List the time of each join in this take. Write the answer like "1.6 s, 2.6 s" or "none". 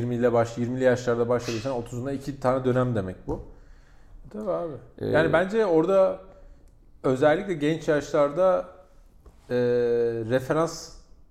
4.3 s